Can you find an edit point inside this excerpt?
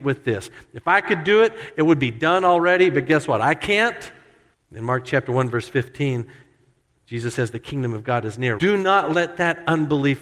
yes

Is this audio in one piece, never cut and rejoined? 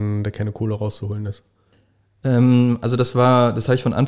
yes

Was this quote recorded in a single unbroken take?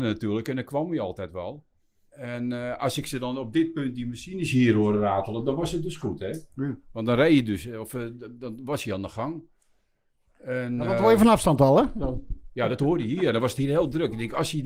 yes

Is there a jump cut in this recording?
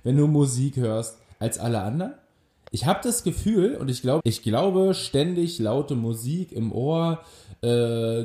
yes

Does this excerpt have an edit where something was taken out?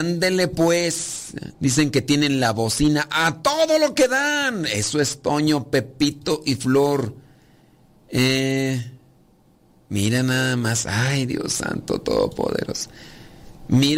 no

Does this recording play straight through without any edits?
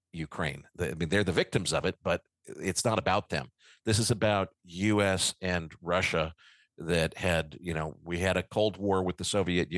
yes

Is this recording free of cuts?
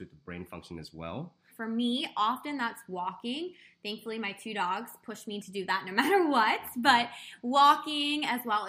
no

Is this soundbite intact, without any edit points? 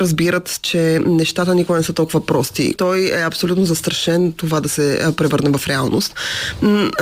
no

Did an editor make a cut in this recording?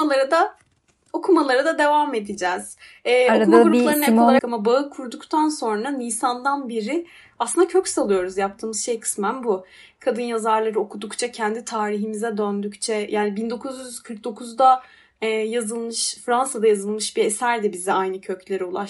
yes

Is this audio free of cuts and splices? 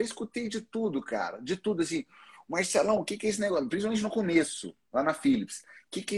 yes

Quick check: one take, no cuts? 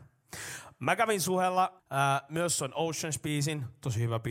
no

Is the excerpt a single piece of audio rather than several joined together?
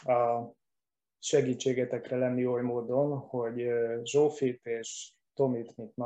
yes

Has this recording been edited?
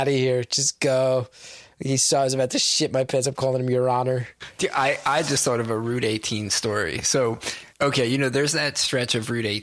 yes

